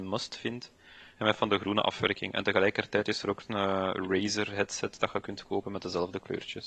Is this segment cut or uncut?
uncut